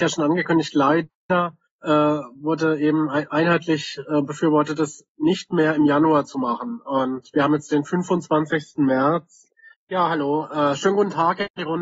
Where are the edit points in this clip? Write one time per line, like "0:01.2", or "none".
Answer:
0:09.7

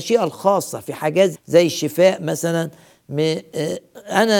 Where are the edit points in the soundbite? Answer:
0:01.3

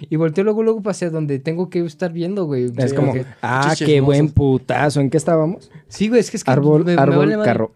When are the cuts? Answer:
none

